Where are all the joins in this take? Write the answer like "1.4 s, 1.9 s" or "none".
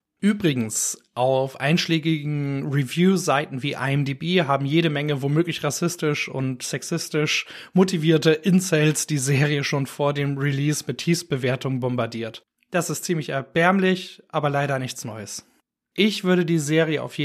none